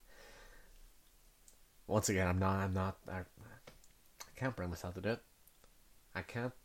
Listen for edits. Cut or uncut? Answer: uncut